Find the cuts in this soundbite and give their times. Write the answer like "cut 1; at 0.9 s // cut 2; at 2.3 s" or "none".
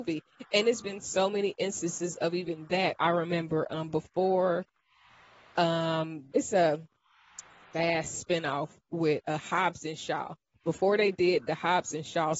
cut 1; at 6.3 s